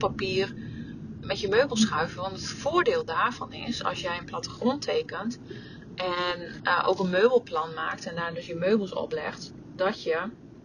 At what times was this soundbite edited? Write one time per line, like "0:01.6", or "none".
0:01.2